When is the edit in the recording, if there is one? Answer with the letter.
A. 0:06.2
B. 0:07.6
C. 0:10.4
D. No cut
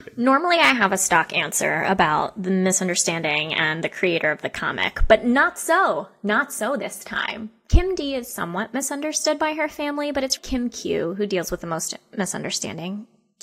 C